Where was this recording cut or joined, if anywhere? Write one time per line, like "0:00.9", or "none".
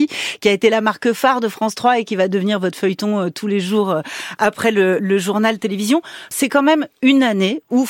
0:05.0
0:06.3